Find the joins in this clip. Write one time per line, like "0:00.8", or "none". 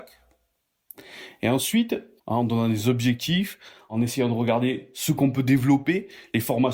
0:02.2